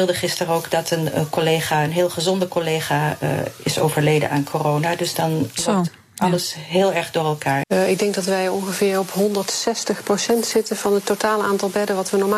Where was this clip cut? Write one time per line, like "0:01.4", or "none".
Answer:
0:07.6